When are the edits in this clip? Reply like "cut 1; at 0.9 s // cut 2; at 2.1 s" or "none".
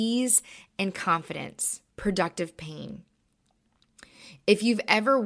cut 1; at 1.9 s